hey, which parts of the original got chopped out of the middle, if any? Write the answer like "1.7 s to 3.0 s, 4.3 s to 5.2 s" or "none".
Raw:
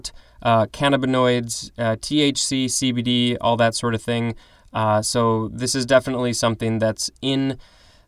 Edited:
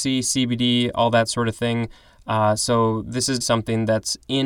5.9 s to 6.3 s